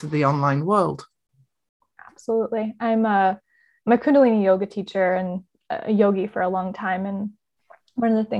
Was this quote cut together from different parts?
no; 0 cuts

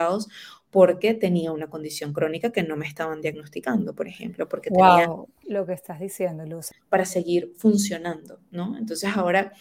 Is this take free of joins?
no; 2 cuts; at 5.4 s, 6.7 s

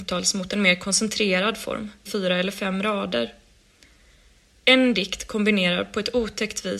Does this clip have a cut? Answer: yes; 1 cut; at 2.1 s

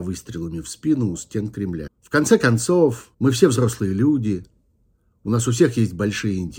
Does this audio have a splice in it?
yes; 2 cuts; at 1.9 s, 3.1 s

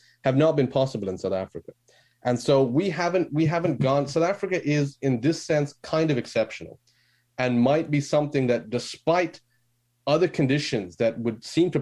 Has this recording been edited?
no; 0 cuts

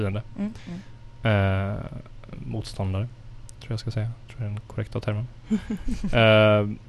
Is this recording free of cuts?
yes; 0 cuts

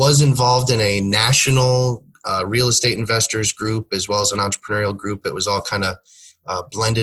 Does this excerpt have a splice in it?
no; 0 cuts

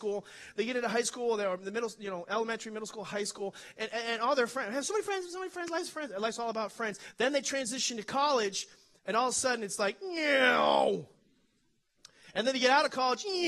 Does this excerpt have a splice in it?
no; 0 cuts

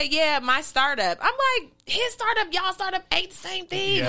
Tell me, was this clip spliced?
no; 0 cuts

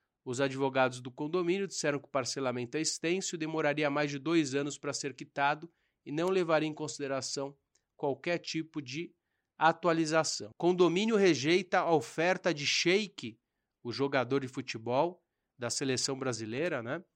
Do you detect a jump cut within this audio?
yes; 1 cut; at 10.5 s

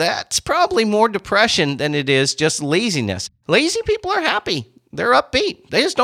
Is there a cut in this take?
no; 0 cuts

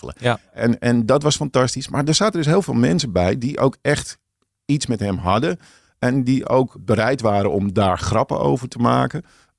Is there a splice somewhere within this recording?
no; 0 cuts

